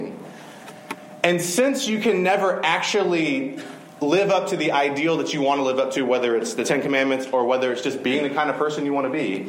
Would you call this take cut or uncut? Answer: uncut